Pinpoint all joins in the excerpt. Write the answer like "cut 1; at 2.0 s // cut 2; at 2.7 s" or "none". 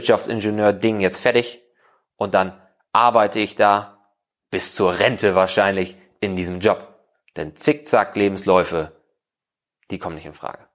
none